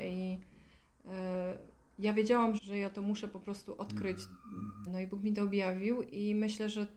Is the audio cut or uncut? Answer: cut